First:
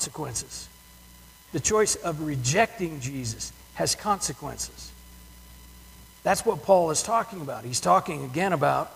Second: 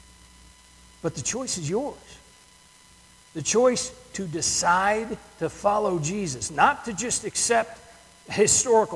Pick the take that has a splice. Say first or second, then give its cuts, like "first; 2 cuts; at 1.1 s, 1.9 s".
first; 1 cut; at 1.4 s